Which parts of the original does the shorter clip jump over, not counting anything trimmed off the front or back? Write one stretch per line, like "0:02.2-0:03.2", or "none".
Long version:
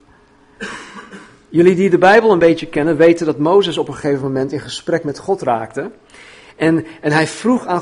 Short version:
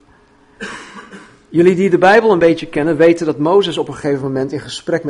none